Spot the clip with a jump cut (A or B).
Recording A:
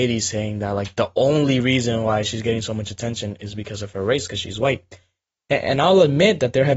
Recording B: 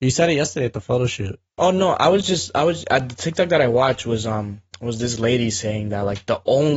B